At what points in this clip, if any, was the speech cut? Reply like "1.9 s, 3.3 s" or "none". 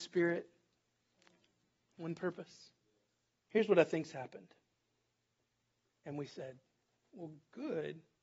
3.5 s, 5.9 s